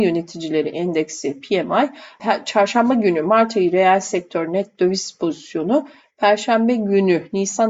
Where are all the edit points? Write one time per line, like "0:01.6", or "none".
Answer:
0:02.2